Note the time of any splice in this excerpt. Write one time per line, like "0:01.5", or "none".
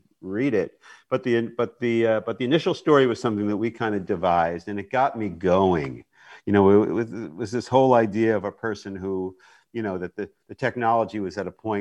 none